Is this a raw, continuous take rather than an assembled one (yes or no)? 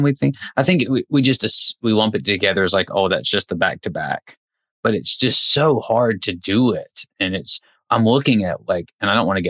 yes